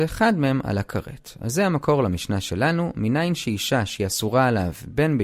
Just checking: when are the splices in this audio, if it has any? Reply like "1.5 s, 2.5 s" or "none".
none